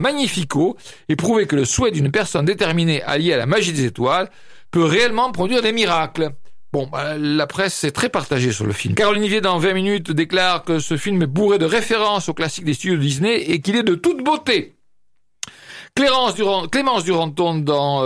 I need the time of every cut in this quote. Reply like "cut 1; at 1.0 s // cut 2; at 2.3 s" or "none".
cut 1; at 8.9 s